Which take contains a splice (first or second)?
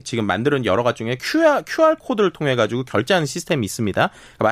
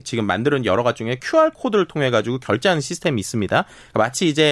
second